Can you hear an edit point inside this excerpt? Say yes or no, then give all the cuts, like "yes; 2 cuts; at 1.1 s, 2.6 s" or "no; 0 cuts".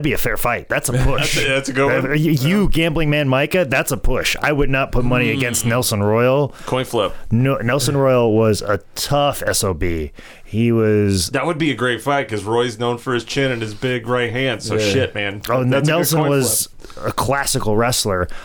no; 0 cuts